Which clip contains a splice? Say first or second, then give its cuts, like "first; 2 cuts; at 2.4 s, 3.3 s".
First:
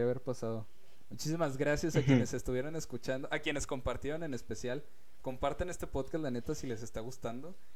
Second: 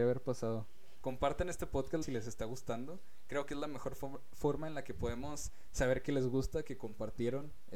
second; 2 cuts; at 1.0 s, 2.0 s